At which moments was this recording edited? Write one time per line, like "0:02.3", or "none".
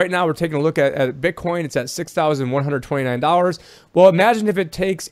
none